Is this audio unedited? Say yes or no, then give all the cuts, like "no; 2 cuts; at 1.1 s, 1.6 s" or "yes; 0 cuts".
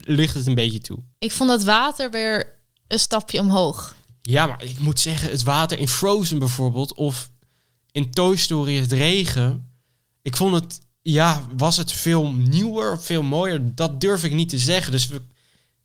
no; 1 cut; at 1.1 s